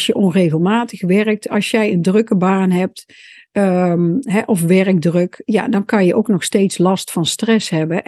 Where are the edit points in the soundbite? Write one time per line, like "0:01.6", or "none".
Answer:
none